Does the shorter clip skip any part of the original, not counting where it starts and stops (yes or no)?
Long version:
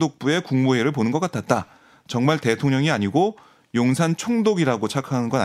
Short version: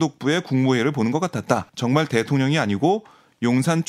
yes